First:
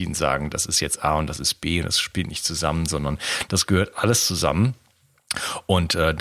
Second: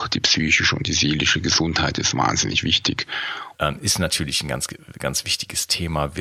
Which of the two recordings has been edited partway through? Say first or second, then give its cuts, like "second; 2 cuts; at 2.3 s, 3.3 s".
second; 1 cut; at 3.5 s